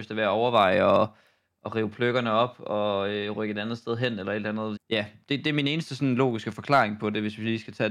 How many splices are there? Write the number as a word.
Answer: one